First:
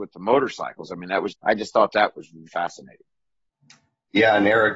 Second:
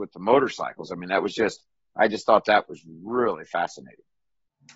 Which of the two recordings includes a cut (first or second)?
first